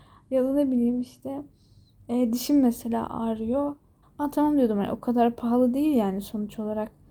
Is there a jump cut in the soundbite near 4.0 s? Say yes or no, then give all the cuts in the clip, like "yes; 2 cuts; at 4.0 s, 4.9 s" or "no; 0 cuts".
yes; 1 cut; at 4.0 s